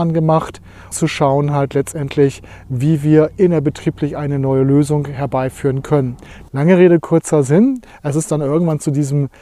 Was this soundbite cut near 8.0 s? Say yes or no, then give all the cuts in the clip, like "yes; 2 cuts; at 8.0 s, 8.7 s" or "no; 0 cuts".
no; 2 cuts; at 0.9 s, 6.5 s